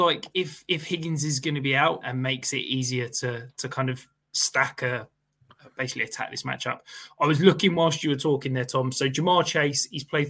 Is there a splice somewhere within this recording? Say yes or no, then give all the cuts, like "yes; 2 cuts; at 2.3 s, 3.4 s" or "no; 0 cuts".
yes; 1 cut; at 2.0 s